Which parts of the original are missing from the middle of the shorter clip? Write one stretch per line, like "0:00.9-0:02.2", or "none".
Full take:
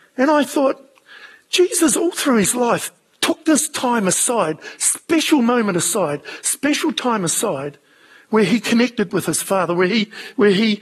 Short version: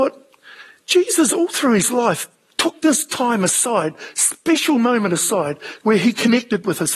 0:06.4-0:08.2